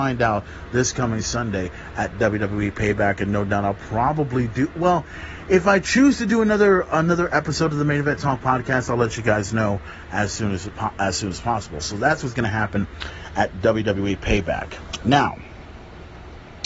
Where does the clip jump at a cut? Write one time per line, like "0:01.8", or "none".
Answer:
none